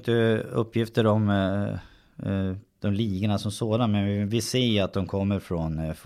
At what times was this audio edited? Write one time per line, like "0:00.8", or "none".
0:02.7